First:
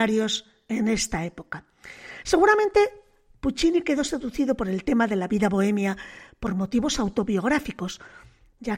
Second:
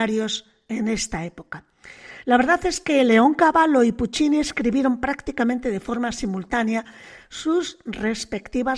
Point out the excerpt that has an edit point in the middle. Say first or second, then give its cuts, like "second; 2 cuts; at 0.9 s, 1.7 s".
first; 1 cut; at 2.2 s